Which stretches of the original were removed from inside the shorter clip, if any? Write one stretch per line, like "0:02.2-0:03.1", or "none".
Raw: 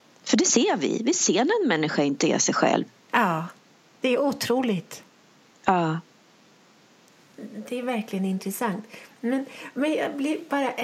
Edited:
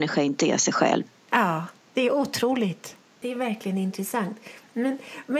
0:03.6-0:03.9
0:05.3-0:07.7